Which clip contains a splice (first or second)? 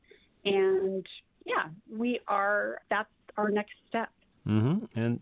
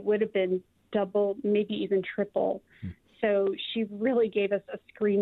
first